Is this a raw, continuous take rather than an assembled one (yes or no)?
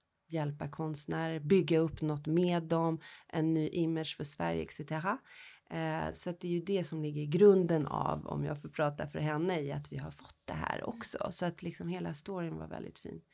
yes